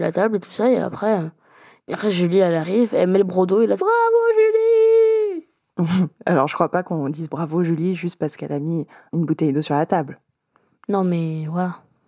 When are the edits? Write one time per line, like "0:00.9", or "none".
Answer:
0:03.8